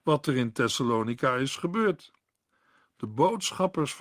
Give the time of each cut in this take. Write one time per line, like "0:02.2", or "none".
none